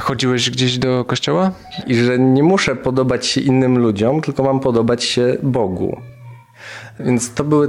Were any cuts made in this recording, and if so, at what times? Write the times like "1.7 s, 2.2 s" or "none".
1.8 s